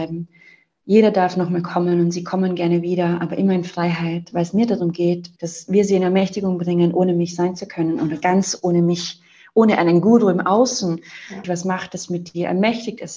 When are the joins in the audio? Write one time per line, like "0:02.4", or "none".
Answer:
0:05.4
0:11.4